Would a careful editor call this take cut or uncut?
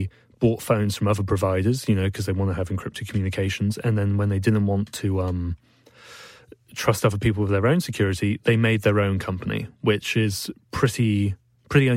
uncut